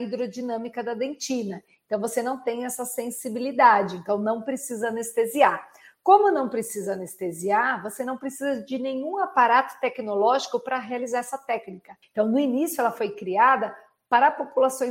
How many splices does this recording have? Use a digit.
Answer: 1